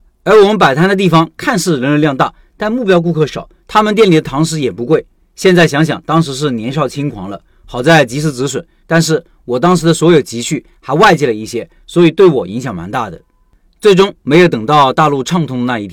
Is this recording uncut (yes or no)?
no